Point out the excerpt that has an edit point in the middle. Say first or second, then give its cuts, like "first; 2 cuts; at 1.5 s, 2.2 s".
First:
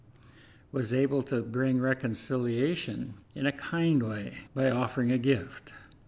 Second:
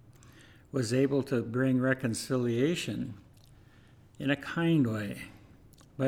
first; 2 cuts; at 3.2 s, 4.5 s